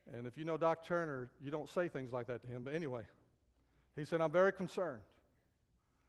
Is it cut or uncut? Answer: uncut